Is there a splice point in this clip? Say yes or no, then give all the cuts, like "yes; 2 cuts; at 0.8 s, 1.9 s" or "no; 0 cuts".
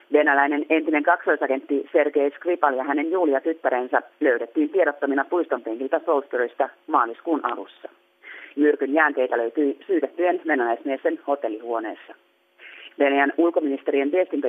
yes; 2 cuts; at 8.5 s, 12.9 s